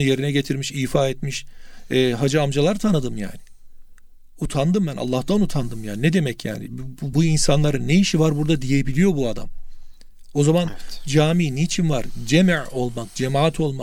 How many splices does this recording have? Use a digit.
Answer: 1